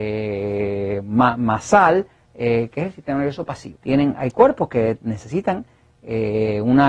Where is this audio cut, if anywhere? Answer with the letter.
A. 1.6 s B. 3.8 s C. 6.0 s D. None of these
B